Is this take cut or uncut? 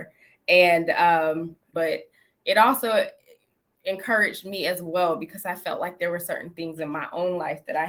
cut